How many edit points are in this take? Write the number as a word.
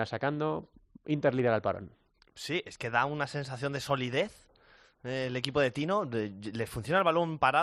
zero